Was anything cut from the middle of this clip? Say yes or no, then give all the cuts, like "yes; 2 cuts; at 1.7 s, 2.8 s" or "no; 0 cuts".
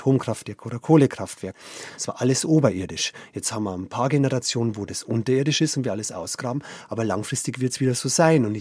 yes; 1 cut; at 1.9 s